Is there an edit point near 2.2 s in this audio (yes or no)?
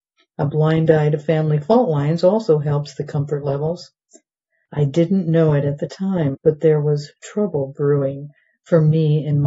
no